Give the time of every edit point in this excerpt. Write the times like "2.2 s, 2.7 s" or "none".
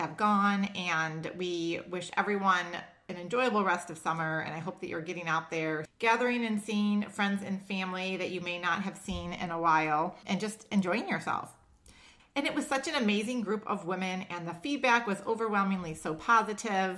5.8 s, 12.2 s